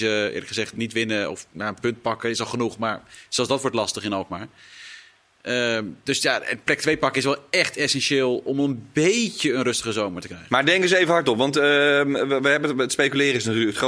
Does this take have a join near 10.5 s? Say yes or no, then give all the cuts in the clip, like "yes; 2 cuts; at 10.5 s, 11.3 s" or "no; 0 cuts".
no; 0 cuts